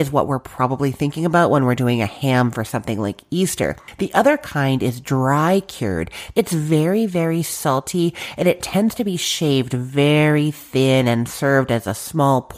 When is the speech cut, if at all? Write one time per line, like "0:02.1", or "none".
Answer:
0:06.3